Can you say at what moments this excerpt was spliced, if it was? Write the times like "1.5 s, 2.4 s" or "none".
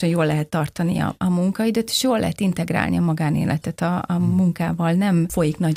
none